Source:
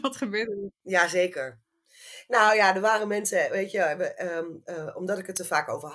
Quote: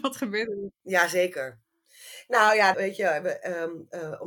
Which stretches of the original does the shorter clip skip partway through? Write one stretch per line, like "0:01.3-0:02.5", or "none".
0:02.7-0:03.5